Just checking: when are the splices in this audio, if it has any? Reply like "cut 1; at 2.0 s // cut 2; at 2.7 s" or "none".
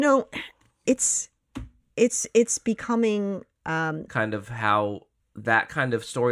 cut 1; at 4.1 s